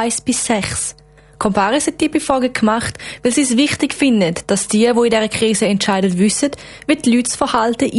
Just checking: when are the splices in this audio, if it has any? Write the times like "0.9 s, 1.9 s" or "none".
none